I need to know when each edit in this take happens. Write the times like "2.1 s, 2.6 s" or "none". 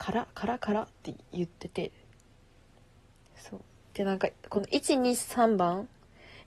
none